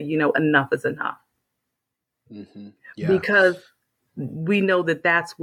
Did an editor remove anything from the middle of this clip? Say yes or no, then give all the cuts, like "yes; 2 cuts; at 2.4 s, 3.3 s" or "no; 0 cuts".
no; 0 cuts